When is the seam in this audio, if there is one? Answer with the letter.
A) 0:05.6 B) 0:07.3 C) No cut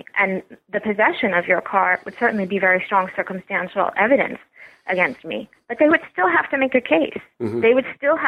C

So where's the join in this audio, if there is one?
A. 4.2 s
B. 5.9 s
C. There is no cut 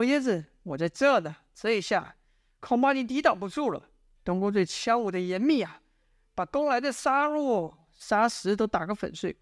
A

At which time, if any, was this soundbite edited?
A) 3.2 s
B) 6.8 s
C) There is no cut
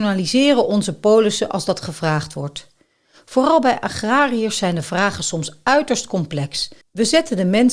B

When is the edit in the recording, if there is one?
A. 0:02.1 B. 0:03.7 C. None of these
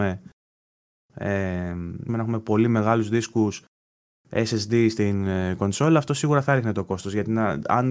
A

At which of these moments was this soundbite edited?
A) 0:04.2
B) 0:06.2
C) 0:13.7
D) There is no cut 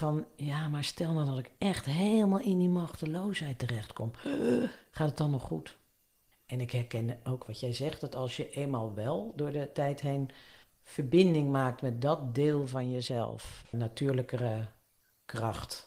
C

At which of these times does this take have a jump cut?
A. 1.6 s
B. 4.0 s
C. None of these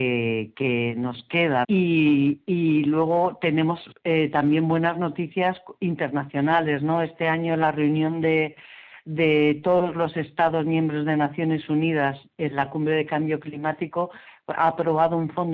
A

